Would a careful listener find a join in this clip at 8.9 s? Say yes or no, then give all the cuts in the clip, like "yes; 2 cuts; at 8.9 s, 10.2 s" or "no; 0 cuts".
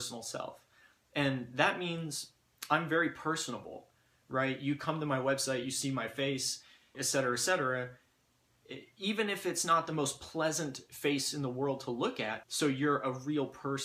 no; 2 cuts; at 6.9 s, 12.4 s